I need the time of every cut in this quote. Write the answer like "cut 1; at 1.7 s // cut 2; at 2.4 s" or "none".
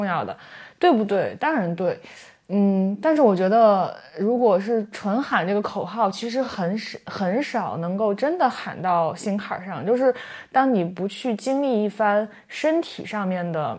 none